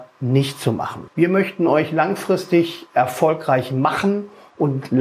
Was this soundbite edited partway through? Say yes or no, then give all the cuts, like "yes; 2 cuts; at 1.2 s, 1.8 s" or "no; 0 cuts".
yes; 1 cut; at 1.1 s